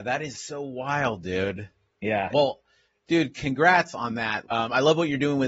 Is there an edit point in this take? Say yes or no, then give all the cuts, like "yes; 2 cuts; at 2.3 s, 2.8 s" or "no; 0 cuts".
yes; 2 cuts; at 2.3 s, 4.4 s